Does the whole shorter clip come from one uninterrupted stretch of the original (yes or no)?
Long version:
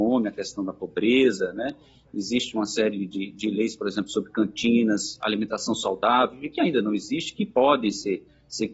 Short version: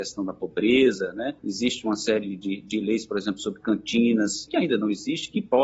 no